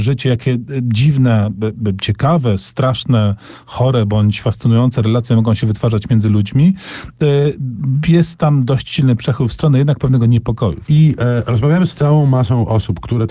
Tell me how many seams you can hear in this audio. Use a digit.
1